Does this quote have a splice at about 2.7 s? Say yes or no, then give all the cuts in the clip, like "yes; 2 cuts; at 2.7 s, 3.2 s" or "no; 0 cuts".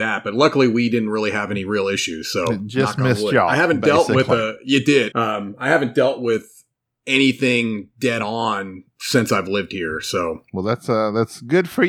no; 1 cut; at 5.1 s